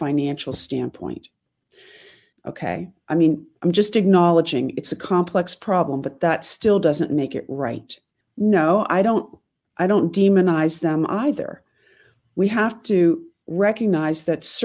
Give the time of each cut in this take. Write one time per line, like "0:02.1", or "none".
0:02.3
0:08.2